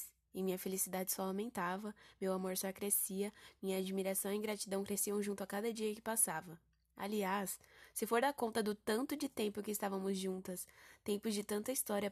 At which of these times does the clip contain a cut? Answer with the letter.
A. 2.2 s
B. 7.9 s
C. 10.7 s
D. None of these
D